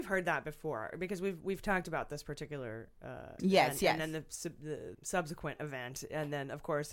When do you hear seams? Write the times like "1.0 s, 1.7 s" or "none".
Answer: 3.4 s, 4.9 s